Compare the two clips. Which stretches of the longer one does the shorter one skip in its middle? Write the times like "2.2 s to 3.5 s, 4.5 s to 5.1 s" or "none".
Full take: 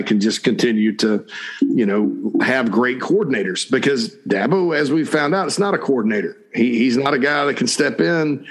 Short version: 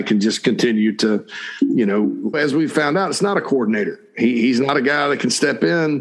2.3 s to 4.7 s